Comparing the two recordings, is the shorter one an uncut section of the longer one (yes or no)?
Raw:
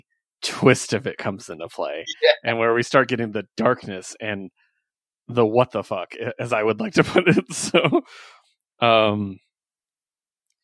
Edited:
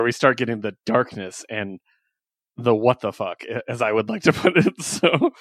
yes